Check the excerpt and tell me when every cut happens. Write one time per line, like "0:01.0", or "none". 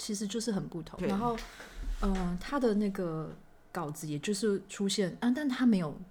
0:01.0